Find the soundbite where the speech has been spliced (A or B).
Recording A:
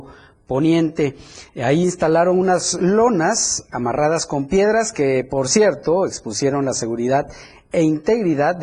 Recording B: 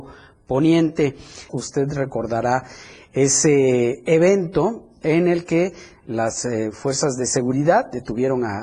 B